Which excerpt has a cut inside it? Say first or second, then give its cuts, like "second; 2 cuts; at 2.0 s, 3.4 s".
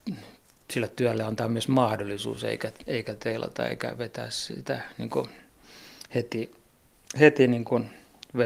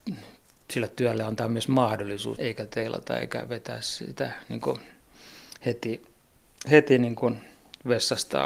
second; 1 cut; at 2.4 s